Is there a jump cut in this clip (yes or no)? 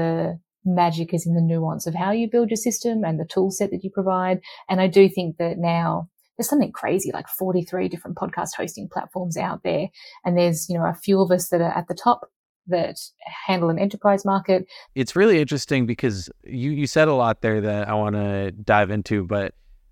yes